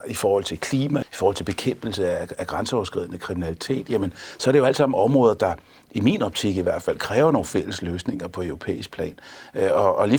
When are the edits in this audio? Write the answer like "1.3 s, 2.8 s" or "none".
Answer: 1.0 s